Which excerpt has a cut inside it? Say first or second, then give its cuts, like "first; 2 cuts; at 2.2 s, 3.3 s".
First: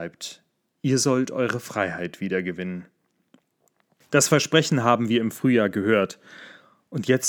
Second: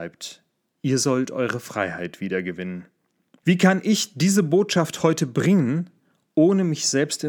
second; 1 cut; at 3.4 s